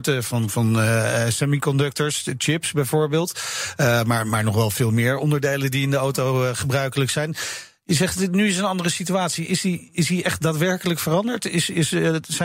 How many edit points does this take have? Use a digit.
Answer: 0